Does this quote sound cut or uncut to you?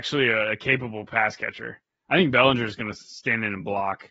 uncut